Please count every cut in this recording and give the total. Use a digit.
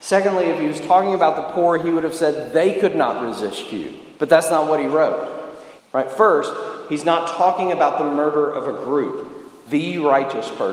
3